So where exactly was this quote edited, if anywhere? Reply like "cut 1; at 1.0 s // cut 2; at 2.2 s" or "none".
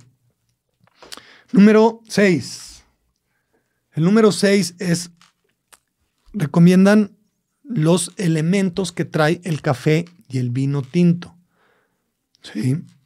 none

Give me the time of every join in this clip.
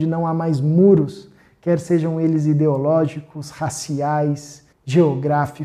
cut 1; at 4.7 s

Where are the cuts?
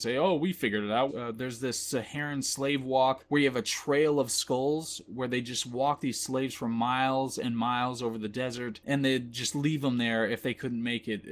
cut 1; at 1.1 s

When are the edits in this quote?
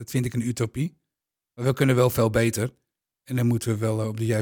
none

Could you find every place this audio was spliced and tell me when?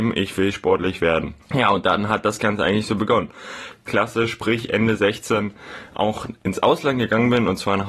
cut 1; at 1.4 s // cut 2; at 3.9 s

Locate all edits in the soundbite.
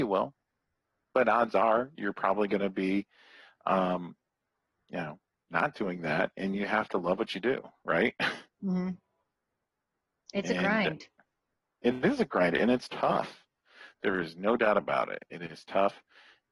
none

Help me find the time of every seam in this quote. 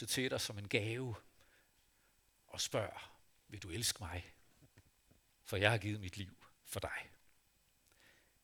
cut 1; at 5.4 s // cut 2; at 6.5 s

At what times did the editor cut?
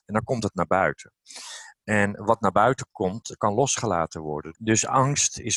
cut 1; at 4.5 s

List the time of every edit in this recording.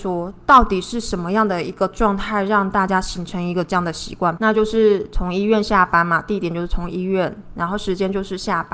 cut 1; at 4.4 s

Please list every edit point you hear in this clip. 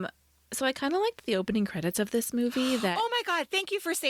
none

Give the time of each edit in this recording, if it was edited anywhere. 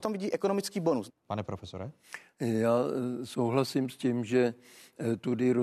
cut 1; at 1.1 s

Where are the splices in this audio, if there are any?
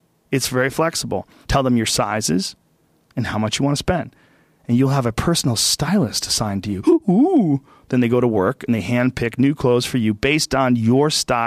cut 1; at 1.4 s // cut 2; at 3.1 s

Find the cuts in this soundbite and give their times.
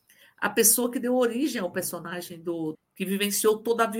cut 1; at 2.7 s

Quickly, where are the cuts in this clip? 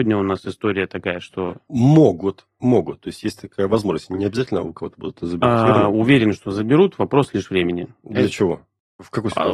none

